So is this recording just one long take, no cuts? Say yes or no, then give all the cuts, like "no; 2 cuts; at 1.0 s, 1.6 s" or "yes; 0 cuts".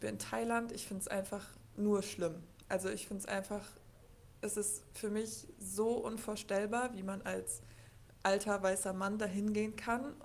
yes; 0 cuts